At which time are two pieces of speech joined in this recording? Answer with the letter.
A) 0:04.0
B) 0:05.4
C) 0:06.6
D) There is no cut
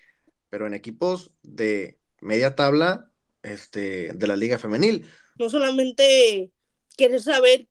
B